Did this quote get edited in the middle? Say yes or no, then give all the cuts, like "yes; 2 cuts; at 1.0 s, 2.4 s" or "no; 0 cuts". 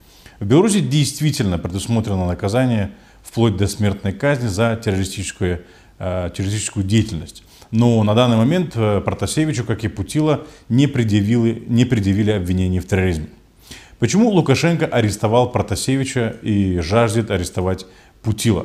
no; 0 cuts